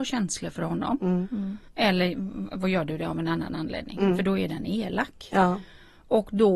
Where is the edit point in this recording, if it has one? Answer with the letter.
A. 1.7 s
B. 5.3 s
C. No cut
A